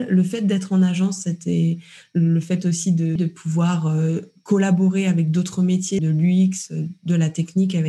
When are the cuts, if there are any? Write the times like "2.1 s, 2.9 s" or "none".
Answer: 3.2 s, 6.0 s

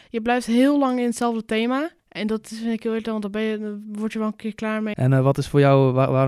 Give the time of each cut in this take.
2.0 s, 4.9 s

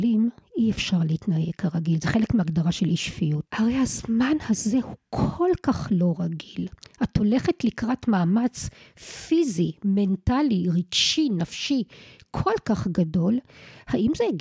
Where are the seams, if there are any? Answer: 3.5 s

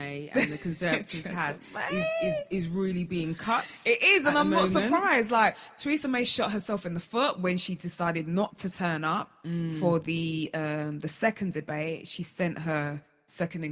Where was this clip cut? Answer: none

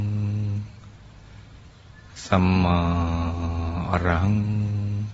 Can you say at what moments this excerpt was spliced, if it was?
none

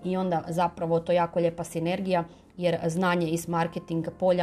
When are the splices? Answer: none

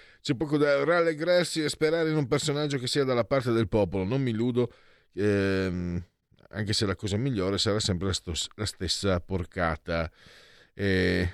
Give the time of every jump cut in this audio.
none

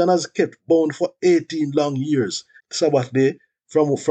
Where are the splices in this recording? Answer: 2.6 s

